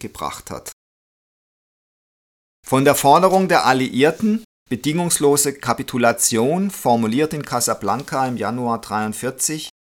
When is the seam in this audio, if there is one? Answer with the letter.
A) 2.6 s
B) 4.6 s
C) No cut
C